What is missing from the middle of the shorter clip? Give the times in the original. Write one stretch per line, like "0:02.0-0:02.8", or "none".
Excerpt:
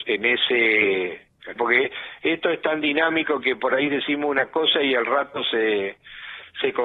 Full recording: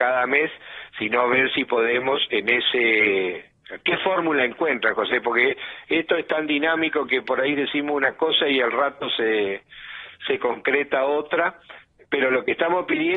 0:03.8-0:05.2